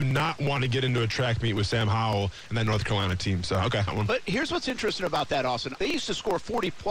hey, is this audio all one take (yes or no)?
no